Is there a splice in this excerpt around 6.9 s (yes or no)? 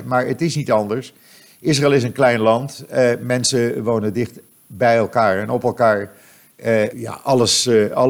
yes